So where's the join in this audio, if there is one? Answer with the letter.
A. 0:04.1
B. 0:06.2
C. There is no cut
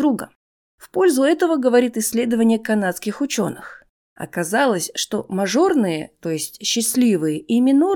A